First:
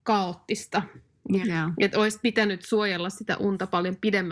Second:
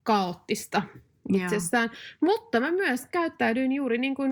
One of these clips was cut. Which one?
first; 1 cut; at 1.4 s

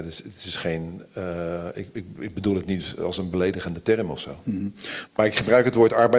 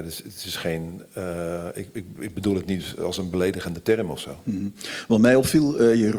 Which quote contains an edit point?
first; 1 cut; at 5.1 s

